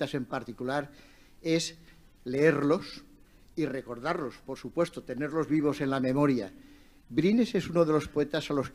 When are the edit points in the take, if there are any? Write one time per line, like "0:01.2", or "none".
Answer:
none